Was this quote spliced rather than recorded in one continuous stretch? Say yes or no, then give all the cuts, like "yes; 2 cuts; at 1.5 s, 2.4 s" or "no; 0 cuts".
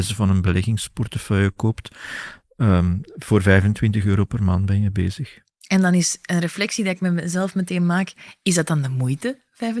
no; 0 cuts